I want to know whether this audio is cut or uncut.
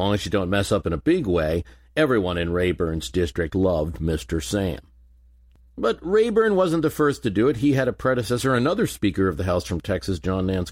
uncut